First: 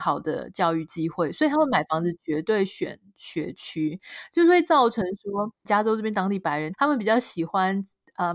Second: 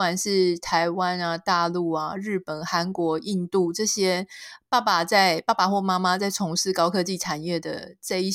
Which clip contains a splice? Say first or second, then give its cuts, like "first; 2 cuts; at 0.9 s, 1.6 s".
first; 2 cuts; at 5.7 s, 6.7 s